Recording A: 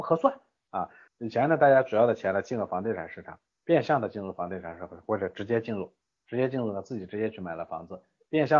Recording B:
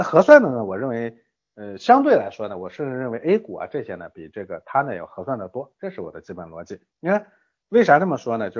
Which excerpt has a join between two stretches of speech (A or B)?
A